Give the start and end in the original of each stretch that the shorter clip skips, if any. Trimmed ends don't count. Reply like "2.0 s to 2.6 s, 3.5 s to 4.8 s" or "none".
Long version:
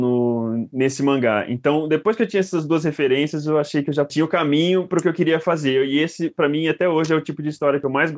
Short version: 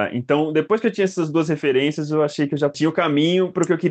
none